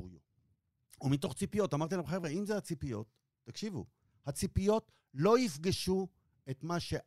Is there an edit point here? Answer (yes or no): no